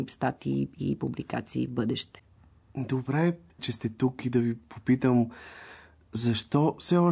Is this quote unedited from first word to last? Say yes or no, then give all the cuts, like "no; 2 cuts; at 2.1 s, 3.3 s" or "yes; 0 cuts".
no; 1 cut; at 3.6 s